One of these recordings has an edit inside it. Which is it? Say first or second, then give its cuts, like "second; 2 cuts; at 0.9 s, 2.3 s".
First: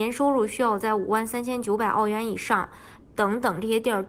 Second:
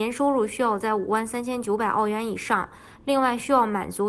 first; 1 cut; at 3.0 s